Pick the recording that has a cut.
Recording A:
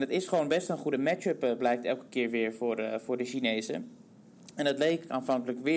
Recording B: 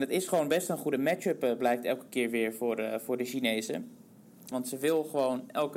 B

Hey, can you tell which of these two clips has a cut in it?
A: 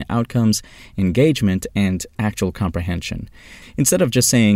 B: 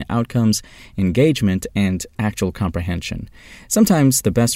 A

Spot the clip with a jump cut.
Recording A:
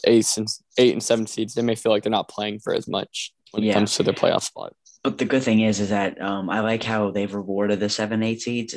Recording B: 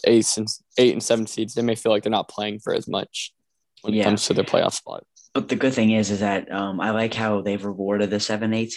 A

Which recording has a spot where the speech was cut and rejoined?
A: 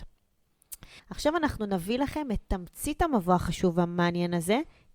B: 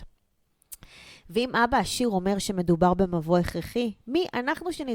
A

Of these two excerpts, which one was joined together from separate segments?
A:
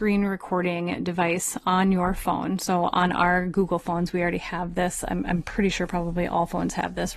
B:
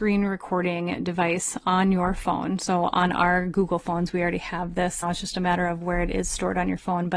B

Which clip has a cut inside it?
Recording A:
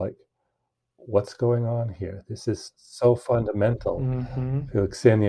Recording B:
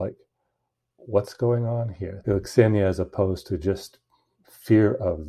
B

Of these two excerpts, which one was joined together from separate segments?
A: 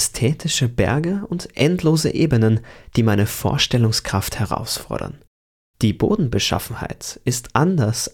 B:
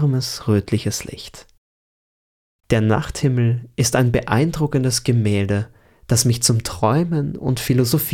B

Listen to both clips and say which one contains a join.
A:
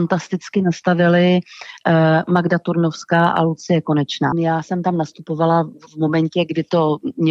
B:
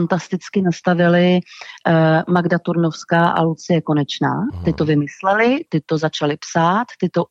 A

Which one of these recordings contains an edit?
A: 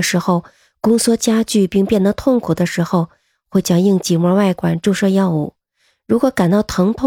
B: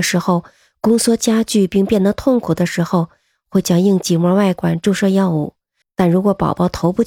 B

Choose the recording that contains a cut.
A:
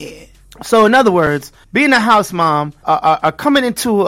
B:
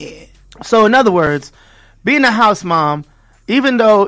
A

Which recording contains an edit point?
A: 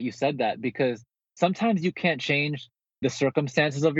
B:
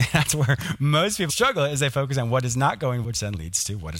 B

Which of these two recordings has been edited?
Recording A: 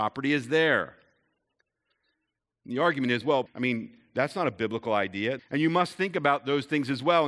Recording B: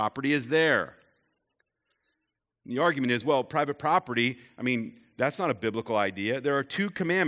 A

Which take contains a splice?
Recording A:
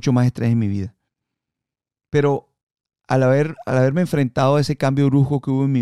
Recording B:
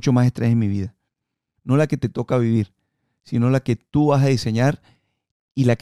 B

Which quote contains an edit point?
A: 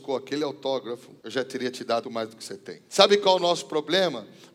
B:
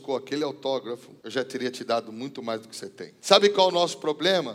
A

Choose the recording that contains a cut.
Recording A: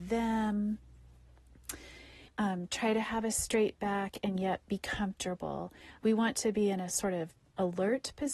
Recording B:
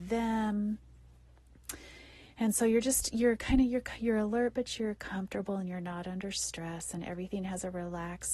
A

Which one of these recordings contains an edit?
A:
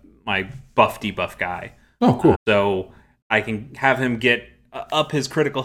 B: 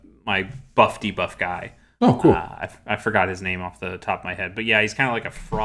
A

